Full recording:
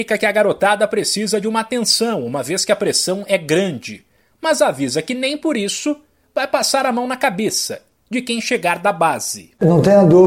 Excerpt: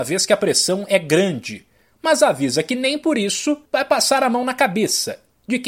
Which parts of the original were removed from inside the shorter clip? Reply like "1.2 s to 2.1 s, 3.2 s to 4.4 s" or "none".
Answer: 6.0 s to 6.3 s

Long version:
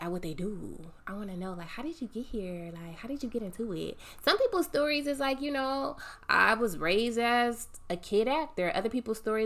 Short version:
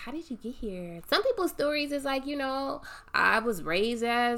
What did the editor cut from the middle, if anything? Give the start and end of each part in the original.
2.7 s to 4.2 s

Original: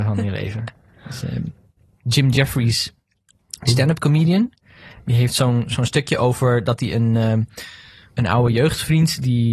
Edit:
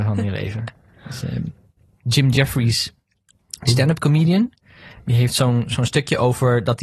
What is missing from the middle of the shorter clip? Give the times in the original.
none

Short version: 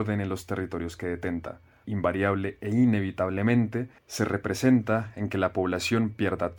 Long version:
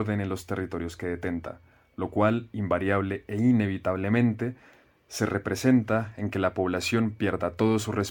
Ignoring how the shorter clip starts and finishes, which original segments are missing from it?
1.8 s to 2.5 s, 4.6 s to 5.0 s

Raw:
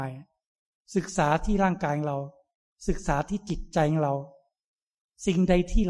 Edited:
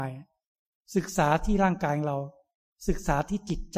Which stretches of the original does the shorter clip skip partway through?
none

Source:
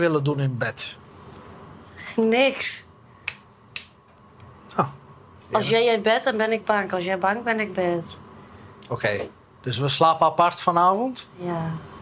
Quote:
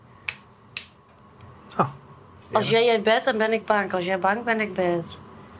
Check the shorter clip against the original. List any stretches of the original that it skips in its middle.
none

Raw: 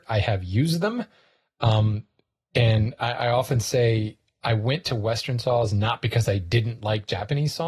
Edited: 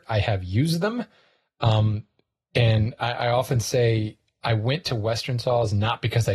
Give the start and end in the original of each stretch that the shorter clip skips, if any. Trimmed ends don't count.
none

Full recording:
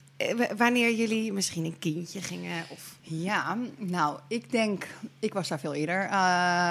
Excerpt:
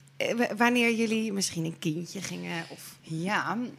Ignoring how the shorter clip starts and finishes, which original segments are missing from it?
none

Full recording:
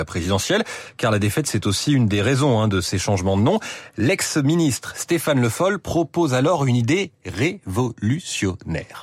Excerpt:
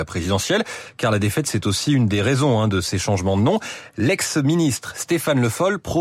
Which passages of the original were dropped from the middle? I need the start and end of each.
none

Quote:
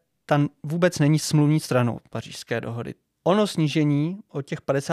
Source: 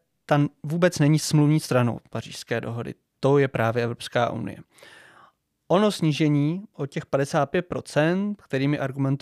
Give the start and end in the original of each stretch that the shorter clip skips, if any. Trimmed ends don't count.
3.1 s to 5.5 s

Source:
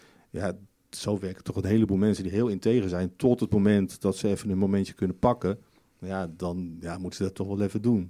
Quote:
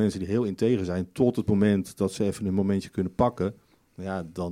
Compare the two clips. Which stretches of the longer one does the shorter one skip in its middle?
none

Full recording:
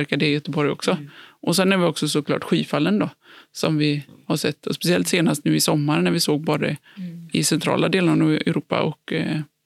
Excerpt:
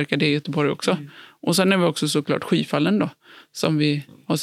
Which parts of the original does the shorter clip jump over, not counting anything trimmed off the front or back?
none

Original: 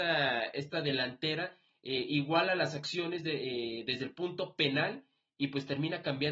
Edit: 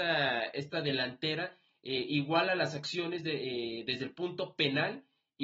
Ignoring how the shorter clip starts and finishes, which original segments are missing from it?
none

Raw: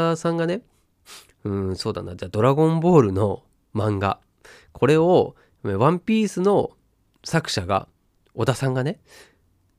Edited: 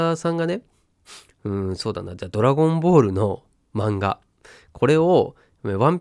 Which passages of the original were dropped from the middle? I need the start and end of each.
none

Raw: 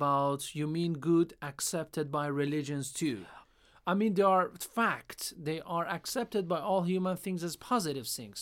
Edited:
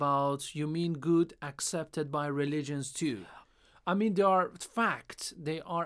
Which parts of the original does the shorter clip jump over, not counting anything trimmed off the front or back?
none

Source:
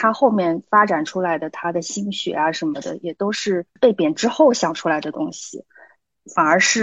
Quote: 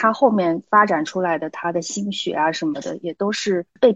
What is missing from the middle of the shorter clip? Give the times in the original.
none

